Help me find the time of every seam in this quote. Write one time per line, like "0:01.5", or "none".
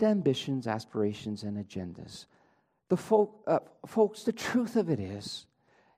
none